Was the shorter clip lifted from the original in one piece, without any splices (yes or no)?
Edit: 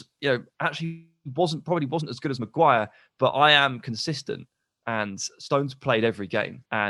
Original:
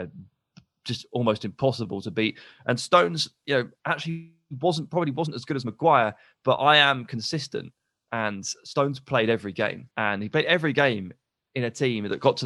yes